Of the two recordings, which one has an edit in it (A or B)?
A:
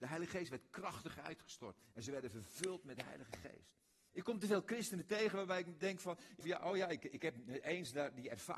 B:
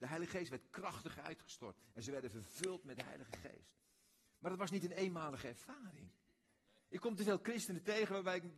A